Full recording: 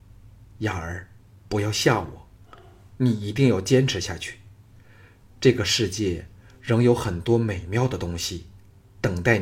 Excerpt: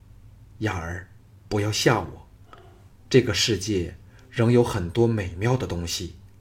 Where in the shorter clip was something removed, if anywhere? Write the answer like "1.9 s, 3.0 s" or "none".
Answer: 2.9 s